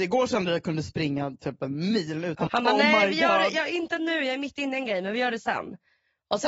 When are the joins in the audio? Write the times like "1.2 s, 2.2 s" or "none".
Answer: 2.5 s